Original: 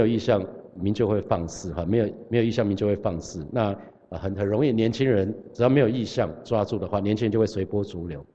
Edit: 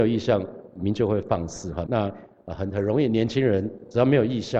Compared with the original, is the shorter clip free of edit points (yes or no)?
no